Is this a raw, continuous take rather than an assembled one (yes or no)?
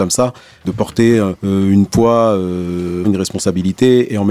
no